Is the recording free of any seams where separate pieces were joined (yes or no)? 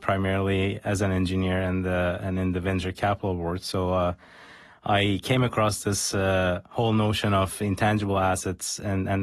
yes